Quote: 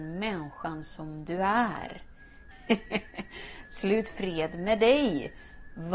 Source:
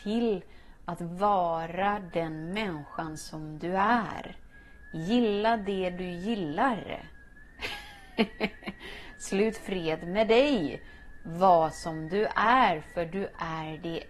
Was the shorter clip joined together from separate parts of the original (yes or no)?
yes